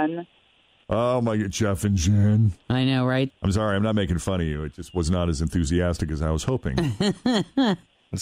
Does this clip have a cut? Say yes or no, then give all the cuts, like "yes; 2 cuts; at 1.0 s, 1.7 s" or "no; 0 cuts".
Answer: yes; 1 cut; at 3.3 s